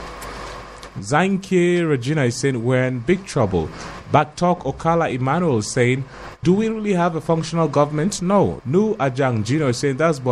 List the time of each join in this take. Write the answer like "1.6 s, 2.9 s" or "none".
6.4 s, 8.6 s